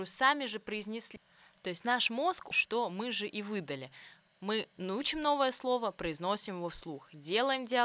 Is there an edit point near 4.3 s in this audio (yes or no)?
no